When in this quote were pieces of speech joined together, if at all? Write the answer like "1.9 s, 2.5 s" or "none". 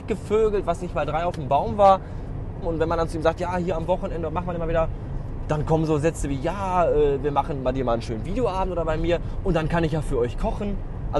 2.6 s